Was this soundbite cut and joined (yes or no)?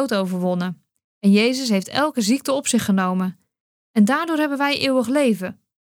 no